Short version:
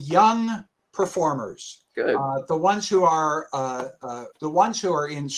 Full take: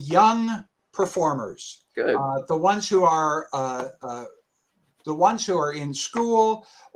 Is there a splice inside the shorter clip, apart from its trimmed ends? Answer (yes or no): yes